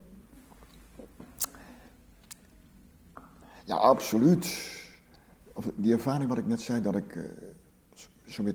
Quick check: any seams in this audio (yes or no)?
no